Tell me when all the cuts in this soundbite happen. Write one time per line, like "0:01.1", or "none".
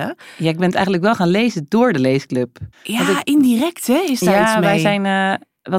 0:02.7